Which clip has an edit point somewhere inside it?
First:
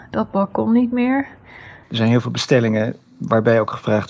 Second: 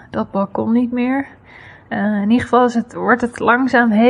first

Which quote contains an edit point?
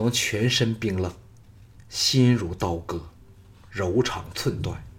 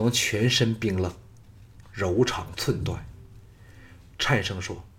second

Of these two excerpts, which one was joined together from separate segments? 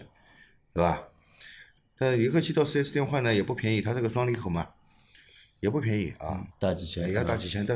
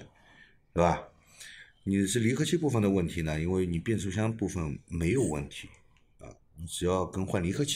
first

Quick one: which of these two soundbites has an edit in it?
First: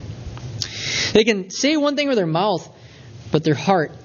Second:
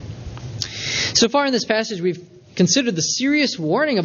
first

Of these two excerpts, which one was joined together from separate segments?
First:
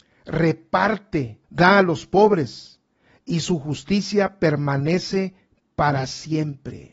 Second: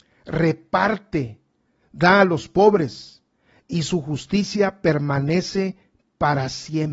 first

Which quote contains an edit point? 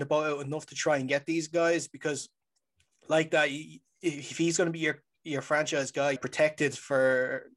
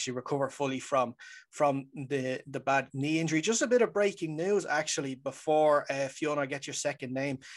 first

